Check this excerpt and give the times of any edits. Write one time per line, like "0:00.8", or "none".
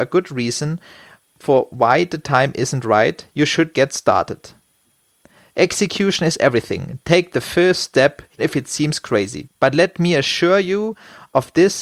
0:03.7
0:08.4
0:09.5